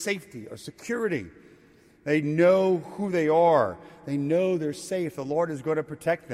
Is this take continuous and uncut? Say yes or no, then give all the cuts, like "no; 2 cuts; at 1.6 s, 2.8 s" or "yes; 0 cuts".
yes; 0 cuts